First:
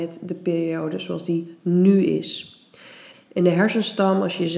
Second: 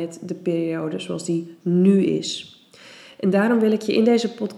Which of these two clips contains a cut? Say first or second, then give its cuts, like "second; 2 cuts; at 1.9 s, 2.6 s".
first; 1 cut; at 3.1 s